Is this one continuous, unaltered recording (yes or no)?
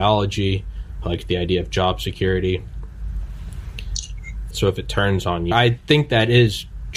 no